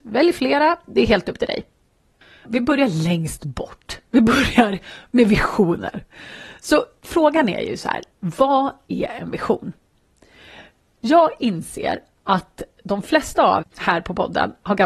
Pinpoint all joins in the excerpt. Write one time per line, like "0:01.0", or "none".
0:02.4
0:13.6